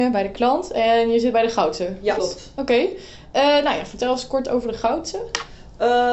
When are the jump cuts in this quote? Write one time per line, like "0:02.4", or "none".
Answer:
0:02.2